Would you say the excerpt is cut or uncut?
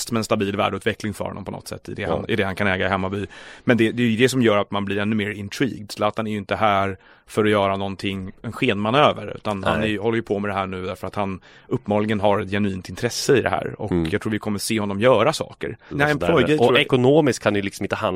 cut